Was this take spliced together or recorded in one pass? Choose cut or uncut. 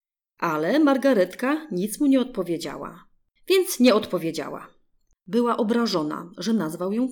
cut